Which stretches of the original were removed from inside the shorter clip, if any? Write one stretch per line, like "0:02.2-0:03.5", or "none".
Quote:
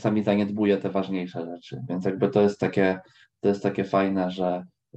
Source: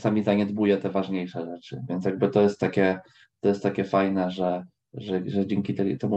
none